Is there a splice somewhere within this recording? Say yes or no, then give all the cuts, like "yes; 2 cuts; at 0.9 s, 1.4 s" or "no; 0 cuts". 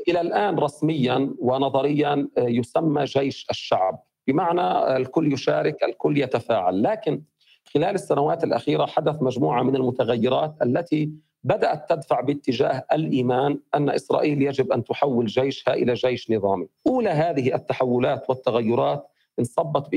yes; 1 cut; at 16.8 s